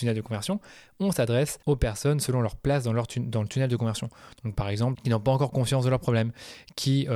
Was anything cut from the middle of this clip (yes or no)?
yes